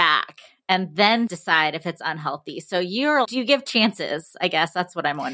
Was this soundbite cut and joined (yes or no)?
yes